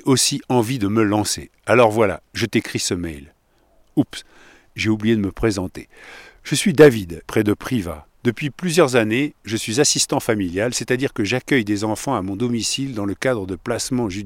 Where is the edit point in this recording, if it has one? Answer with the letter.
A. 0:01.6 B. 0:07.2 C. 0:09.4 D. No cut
B